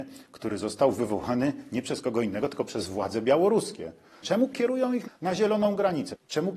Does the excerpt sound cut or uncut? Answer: cut